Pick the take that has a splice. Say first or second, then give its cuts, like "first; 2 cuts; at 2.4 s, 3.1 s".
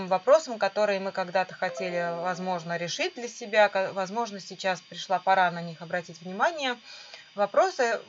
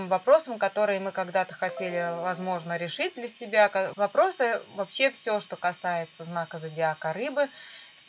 second; 1 cut; at 3.9 s